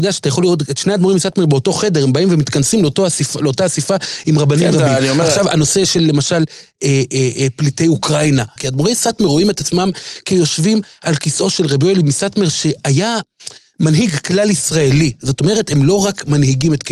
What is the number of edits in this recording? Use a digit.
1